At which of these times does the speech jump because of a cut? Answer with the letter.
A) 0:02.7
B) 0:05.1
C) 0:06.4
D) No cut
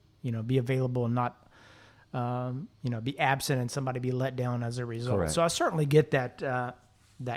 A